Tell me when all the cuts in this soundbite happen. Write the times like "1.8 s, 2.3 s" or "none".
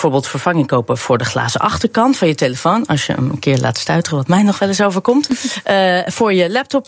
none